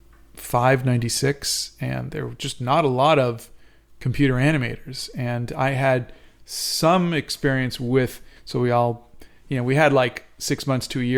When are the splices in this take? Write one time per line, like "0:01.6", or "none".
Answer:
0:08.4